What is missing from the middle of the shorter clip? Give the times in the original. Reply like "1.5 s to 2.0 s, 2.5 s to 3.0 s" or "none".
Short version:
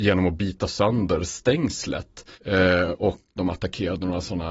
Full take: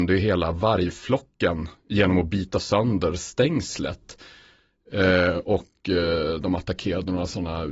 4.3 s to 4.8 s, 5.8 s to 6.4 s